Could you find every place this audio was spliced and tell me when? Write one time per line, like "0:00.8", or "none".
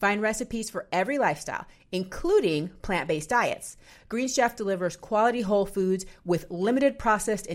none